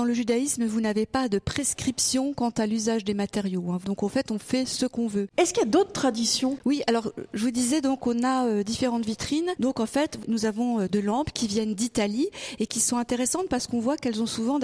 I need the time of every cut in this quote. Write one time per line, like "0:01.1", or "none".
0:10.9